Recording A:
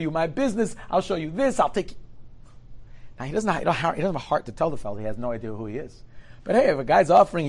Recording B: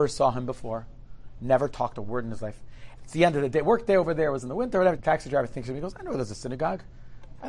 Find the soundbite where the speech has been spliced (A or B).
B